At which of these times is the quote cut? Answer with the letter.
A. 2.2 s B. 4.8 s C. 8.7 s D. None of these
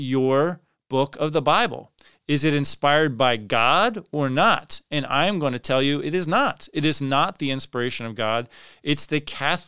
D